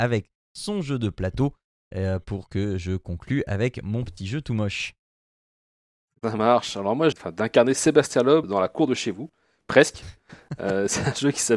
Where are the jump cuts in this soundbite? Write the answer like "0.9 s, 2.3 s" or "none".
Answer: 7.1 s, 8.4 s

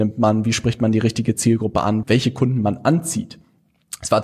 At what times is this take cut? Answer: 2.0 s

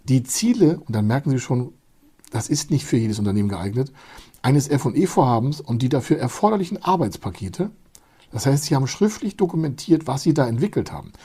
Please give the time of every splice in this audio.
none

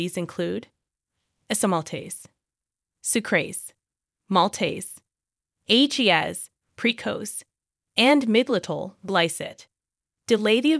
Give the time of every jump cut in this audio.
2.9 s, 6.6 s

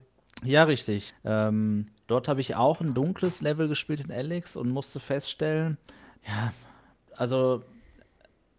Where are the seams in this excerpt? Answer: 1.1 s, 6.2 s

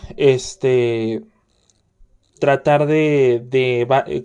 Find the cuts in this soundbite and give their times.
none

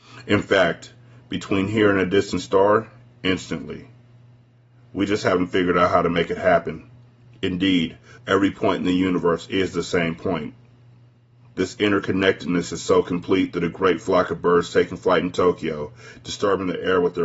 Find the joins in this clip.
8.2 s

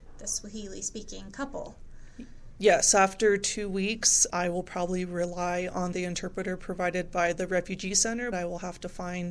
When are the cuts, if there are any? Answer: 4.3 s, 8.3 s

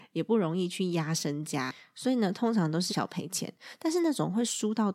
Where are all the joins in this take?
2.9 s

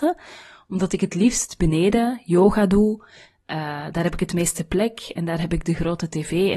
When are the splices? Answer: none

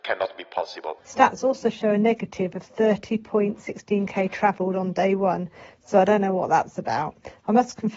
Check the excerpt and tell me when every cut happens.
1.0 s

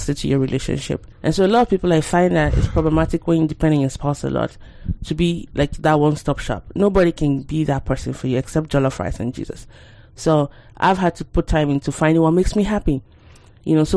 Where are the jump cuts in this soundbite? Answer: 1.1 s

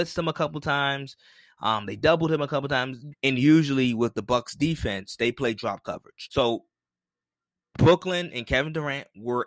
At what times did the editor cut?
3.1 s, 6.3 s

